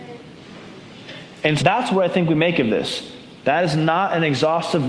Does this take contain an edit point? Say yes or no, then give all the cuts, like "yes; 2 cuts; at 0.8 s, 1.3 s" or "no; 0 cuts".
yes; 2 cuts; at 1.6 s, 3.4 s